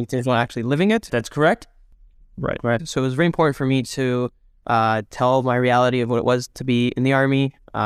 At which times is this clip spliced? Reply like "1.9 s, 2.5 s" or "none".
1.1 s, 2.8 s